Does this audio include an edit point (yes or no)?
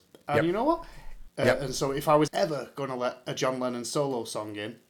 yes